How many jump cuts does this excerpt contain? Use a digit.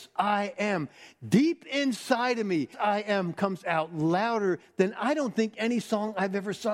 1